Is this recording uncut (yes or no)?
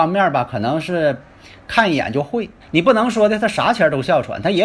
no